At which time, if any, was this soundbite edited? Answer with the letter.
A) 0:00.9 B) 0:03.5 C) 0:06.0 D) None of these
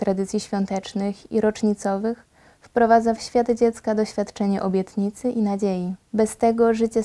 C